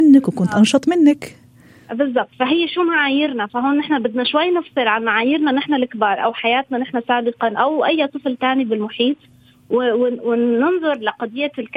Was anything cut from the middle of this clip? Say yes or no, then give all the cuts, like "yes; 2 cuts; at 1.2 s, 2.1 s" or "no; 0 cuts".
no; 0 cuts